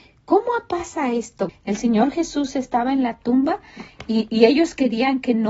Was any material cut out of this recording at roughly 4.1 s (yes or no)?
no